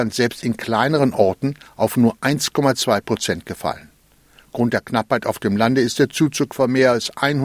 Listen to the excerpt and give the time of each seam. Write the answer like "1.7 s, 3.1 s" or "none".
none

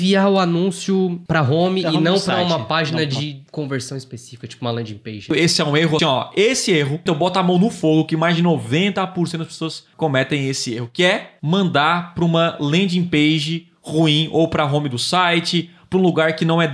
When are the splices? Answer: 6.0 s, 7.1 s

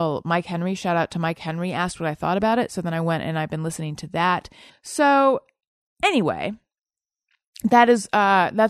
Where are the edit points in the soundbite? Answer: 4.7 s

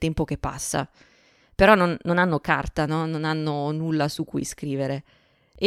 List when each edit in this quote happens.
none

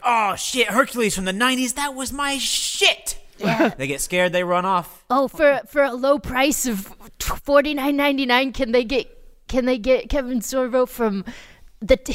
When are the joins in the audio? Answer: none

